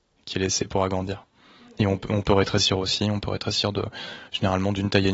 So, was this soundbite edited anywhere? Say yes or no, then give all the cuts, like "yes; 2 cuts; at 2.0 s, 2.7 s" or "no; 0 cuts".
no; 0 cuts